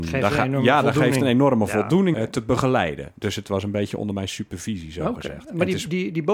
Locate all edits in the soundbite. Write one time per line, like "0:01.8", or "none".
0:02.1